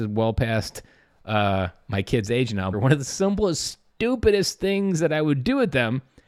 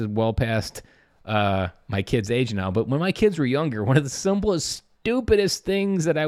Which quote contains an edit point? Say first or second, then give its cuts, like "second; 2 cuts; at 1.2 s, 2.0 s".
first; 1 cut; at 2.7 s